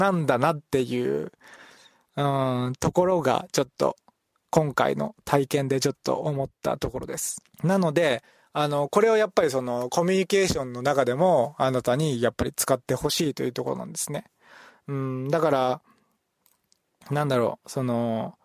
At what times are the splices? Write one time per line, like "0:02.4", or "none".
0:07.5

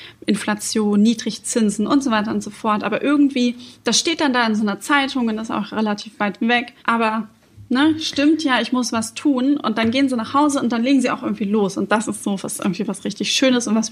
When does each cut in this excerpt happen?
0:06.8

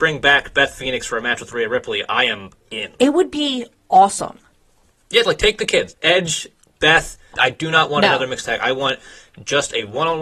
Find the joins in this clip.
0:05.9
0:07.3

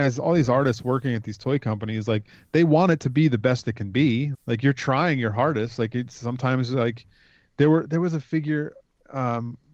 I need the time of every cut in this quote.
0:04.3

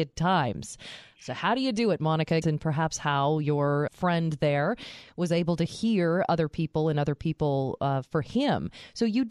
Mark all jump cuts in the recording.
0:02.4
0:03.9

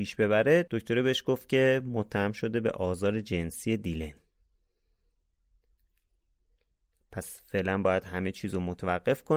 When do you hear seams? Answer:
none

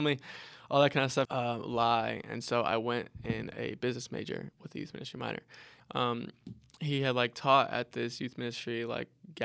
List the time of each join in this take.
0:01.2
0:05.8

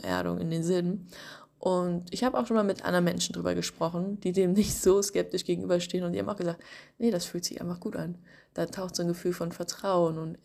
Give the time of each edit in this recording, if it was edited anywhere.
none

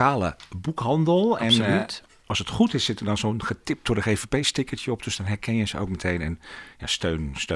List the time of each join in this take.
none

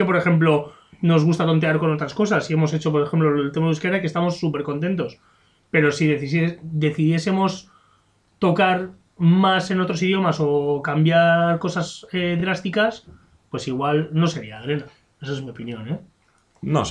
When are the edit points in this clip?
none

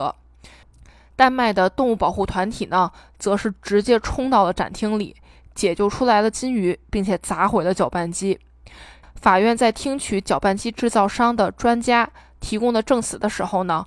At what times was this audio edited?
0:09.0

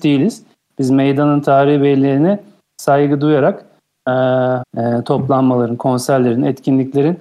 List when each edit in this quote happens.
0:04.6

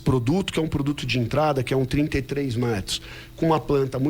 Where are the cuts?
none

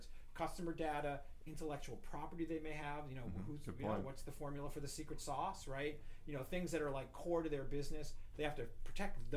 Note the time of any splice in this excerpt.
0:01.4

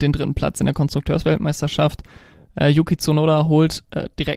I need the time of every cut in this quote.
none

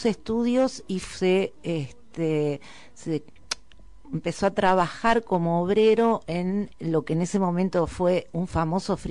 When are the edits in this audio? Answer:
0:06.7

